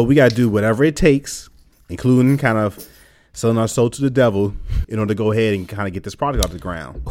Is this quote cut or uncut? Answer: cut